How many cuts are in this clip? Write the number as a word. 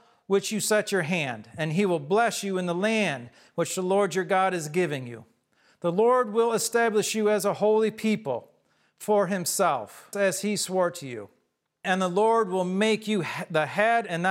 two